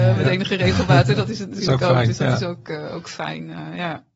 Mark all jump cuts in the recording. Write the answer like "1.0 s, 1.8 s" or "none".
none